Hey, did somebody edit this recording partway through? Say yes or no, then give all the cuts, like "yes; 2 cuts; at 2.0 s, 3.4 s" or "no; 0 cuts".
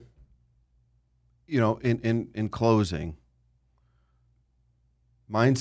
no; 0 cuts